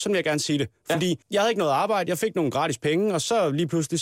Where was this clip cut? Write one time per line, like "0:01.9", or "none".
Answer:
0:01.2